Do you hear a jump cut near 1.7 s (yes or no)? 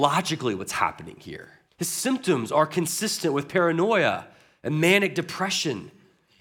yes